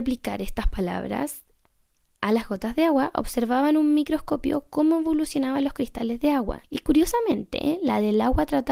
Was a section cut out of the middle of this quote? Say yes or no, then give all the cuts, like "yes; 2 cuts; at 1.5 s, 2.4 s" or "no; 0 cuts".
yes; 1 cut; at 6.6 s